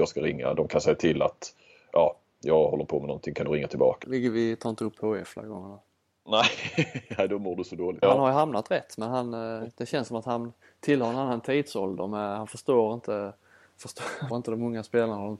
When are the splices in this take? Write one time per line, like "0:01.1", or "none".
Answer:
0:04.0
0:08.0
0:14.3